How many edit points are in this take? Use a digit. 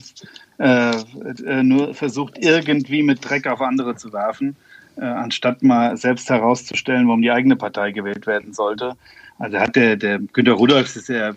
1